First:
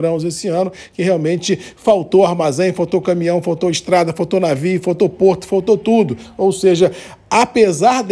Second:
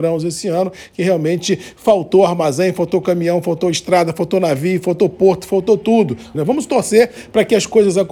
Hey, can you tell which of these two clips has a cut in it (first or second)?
second